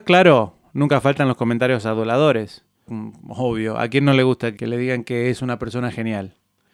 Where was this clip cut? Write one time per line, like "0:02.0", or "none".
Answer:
0:02.9